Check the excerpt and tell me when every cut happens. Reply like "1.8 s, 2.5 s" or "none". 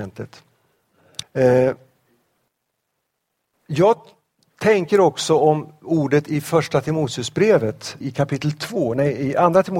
1.2 s, 8.0 s